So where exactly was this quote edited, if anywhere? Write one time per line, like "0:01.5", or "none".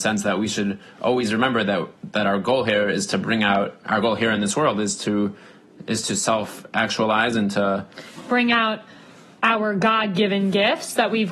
none

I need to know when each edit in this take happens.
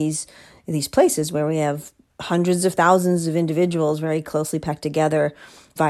none

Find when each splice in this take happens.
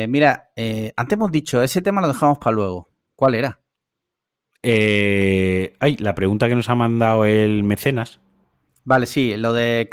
none

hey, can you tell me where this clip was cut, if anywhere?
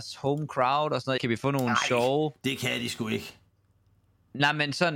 0:01.2

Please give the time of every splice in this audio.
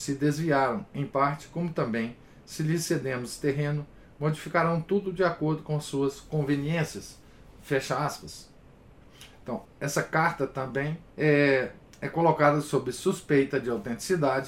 0:09.7
0:11.1

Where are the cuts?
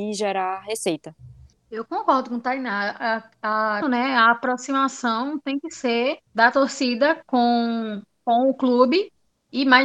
0:01.5
0:03.8
0:06.3

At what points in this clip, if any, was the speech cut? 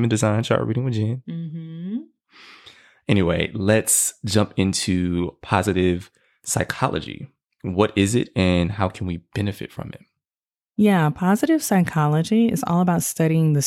none

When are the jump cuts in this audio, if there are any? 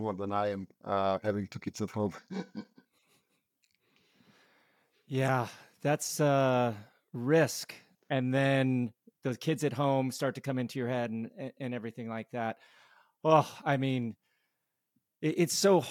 0:07.9

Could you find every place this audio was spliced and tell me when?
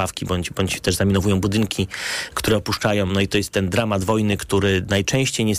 none

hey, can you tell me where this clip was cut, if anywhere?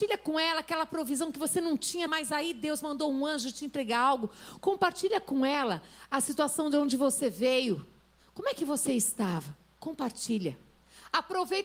0:02.1

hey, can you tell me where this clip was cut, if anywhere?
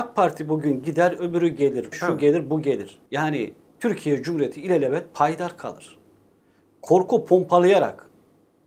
0:01.9
0:03.1

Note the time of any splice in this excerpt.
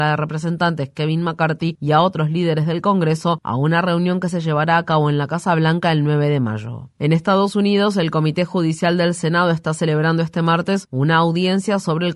none

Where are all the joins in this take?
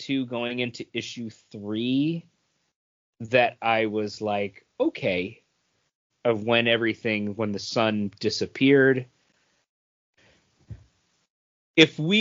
0:06.1

